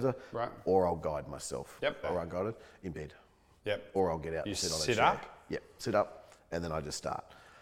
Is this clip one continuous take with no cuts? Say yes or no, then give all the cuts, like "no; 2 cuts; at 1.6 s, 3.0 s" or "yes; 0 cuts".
no; 1 cut; at 2.0 s